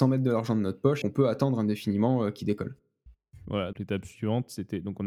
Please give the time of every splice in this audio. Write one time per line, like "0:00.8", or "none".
0:01.0
0:03.7